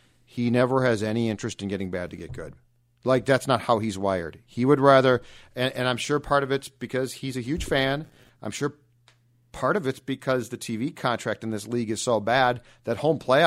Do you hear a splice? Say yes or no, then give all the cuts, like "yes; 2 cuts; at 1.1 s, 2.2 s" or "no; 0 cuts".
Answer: no; 0 cuts